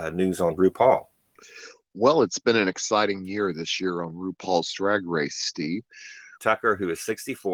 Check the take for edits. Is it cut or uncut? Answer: cut